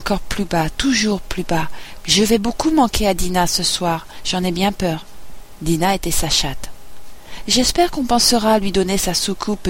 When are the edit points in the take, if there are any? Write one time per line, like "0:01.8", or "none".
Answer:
0:02.0